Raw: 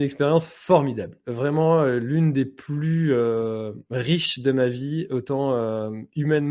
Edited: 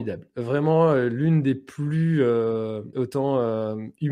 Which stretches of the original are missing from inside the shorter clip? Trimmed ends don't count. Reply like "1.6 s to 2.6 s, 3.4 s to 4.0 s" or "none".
3.8 s to 5.1 s